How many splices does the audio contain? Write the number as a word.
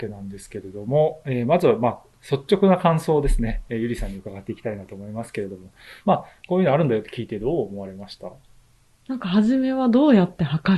one